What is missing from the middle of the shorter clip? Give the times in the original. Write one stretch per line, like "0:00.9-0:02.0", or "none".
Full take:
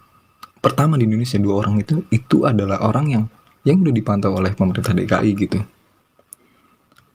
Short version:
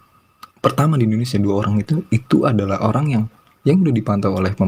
none